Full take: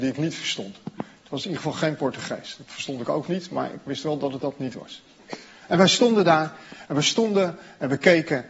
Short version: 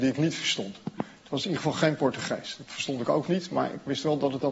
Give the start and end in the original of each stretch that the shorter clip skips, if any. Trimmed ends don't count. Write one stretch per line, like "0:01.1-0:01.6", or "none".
none